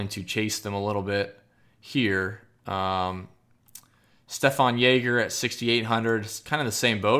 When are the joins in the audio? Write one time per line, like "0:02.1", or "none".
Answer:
none